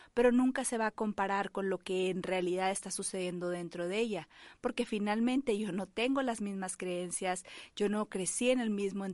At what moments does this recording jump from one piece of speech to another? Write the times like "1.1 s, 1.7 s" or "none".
none